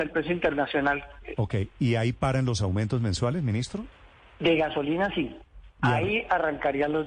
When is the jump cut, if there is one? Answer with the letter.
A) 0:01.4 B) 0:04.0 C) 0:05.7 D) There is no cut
A